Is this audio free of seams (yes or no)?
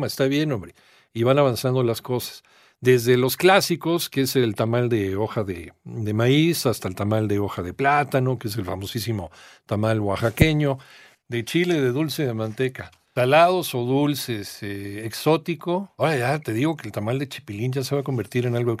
yes